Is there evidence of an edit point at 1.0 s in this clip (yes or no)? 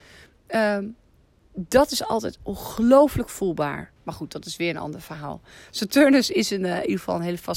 no